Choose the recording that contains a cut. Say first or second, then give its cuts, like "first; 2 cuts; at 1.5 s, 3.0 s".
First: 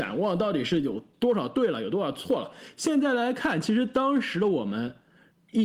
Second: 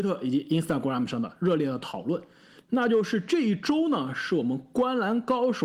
second; 1 cut; at 2.6 s